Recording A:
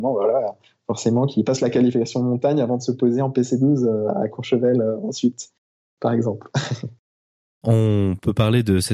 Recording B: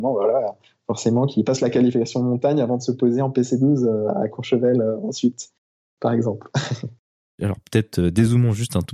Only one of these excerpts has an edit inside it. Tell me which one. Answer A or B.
B